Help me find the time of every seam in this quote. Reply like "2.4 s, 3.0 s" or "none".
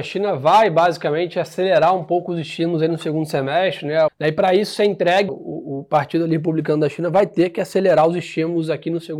4.1 s, 5.3 s